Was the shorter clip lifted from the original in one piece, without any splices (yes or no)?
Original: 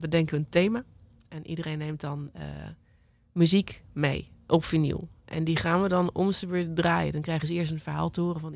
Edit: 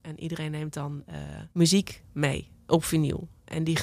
no